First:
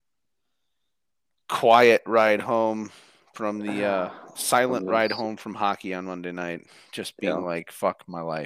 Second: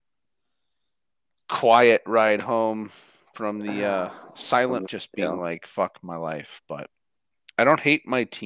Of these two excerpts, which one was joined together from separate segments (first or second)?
second